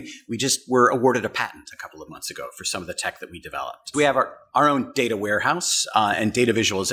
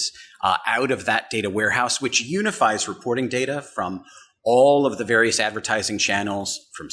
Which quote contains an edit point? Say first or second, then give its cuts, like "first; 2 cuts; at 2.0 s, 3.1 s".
first; 1 cut; at 3.9 s